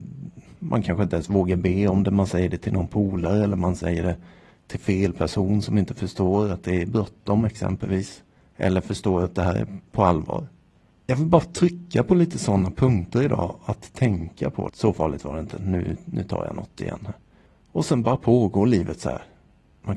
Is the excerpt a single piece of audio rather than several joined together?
no; 1 cut; at 14.7 s

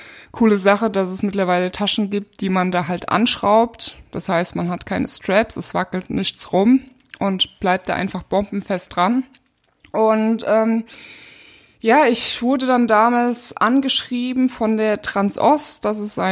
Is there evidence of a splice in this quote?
no; 0 cuts

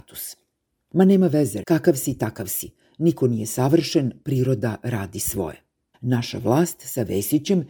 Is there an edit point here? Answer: yes; 2 cuts; at 1.6 s, 5.9 s

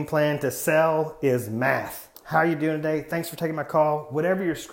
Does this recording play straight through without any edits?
no; 1 cut; at 2.1 s

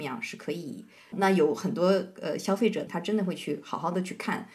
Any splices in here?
yes; 2 cuts; at 1.1 s, 2.9 s

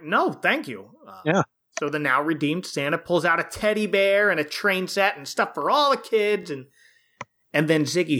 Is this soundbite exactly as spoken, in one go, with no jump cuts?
yes; 0 cuts

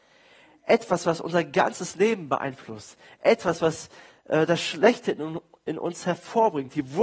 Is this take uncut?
yes; 0 cuts

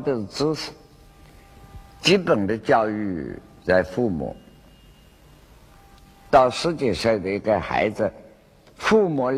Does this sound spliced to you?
yes; 1 cut; at 6.3 s

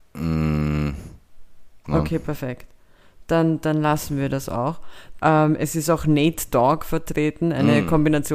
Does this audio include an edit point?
yes; 2 cuts; at 1.8 s, 5.2 s

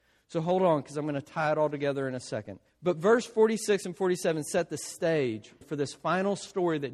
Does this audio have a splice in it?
yes; 2 cuts; at 2.7 s, 5.6 s

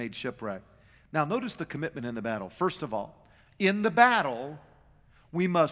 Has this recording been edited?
no; 0 cuts

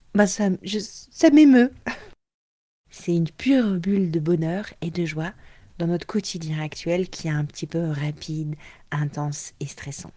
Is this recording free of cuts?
no; 1 cut; at 2.8 s

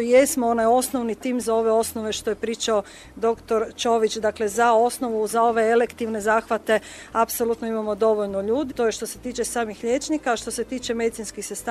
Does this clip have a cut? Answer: yes; 2 cuts; at 5.3 s, 8.7 s

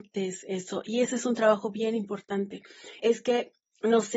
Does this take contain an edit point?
yes; 1 cut; at 3.0 s

